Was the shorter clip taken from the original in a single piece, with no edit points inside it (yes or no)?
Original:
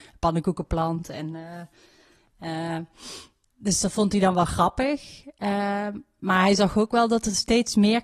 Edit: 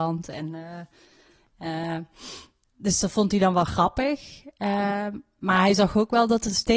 yes